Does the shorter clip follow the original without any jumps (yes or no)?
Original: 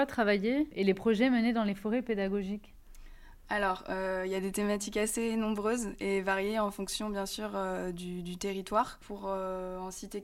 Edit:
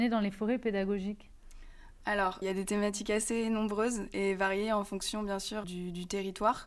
no